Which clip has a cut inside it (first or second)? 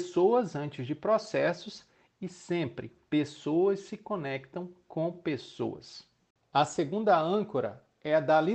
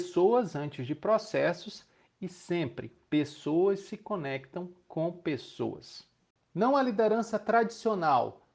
second